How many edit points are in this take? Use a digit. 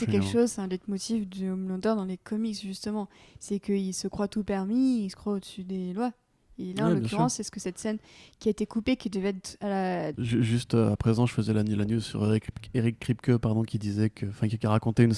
1